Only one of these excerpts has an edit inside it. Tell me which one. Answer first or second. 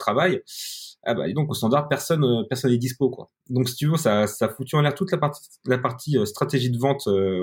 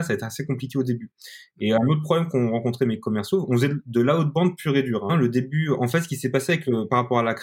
second